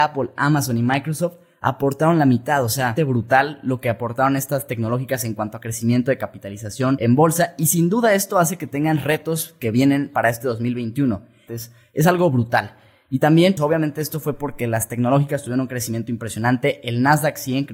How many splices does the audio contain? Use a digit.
3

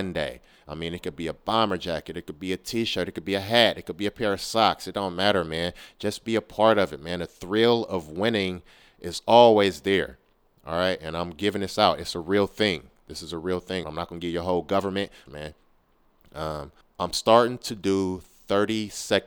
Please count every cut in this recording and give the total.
3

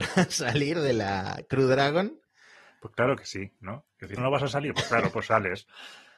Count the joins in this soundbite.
1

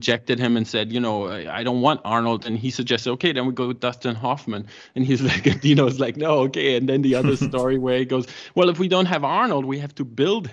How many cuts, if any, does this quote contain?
0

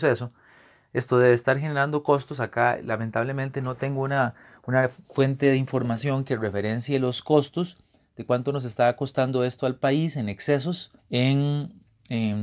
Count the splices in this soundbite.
1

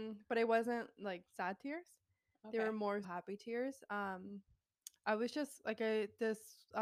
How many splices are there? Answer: 1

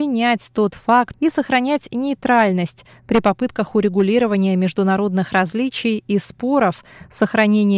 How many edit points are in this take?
1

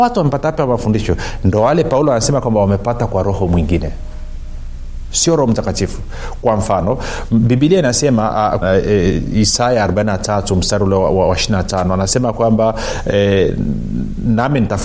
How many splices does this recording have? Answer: 1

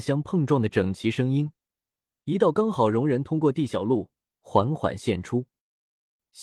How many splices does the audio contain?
0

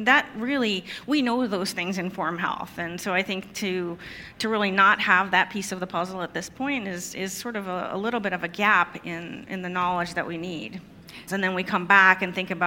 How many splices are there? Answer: 1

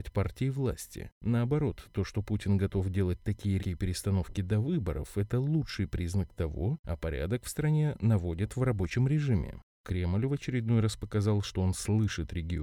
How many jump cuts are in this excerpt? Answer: 3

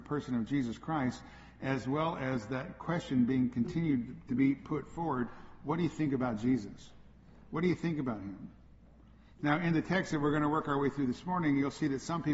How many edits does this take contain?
0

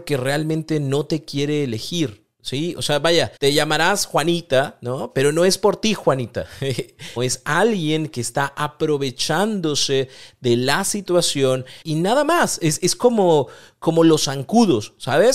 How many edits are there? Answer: 3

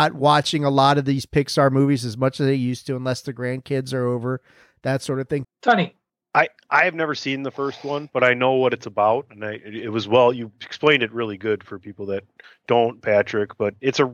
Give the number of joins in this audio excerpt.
1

